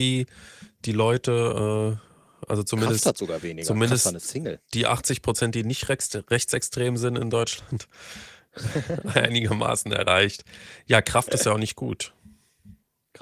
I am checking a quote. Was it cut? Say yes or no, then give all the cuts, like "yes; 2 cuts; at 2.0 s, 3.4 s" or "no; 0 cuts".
no; 0 cuts